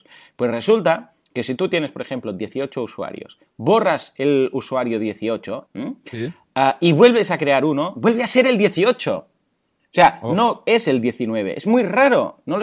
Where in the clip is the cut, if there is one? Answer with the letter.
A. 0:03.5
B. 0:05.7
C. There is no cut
B